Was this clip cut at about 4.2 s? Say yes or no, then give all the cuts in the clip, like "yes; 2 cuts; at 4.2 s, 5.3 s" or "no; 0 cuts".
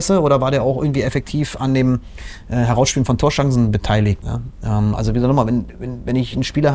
yes; 1 cut; at 4.2 s